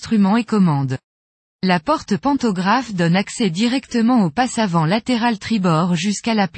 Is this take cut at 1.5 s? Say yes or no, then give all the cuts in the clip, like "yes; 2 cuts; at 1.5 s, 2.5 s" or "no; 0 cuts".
no; 0 cuts